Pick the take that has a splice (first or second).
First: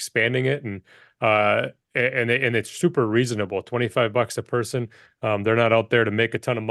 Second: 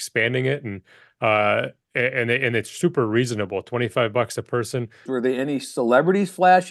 second